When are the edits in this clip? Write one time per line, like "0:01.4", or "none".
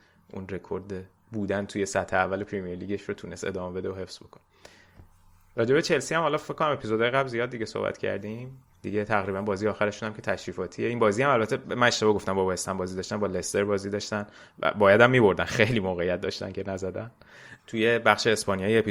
0:17.6